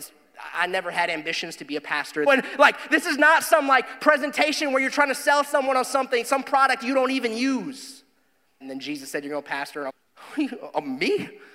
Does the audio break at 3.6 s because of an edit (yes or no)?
no